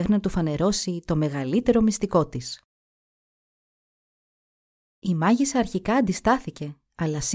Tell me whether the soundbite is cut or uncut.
uncut